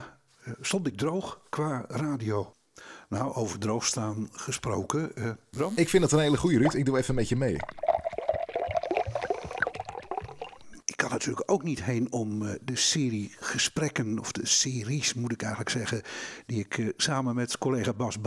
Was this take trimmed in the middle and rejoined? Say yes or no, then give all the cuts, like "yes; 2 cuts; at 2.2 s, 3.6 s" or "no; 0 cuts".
yes; 2 cuts; at 5.5 s, 10.8 s